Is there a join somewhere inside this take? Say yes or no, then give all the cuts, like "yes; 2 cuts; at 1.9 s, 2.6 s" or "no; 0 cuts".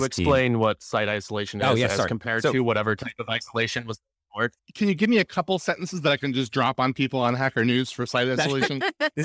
no; 0 cuts